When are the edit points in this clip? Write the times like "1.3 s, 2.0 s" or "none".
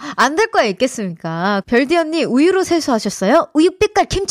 1.6 s